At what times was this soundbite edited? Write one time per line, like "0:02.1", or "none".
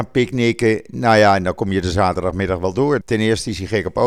0:03.0